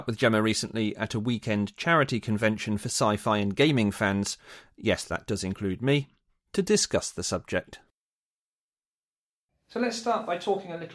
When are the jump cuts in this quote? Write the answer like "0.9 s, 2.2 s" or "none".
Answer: none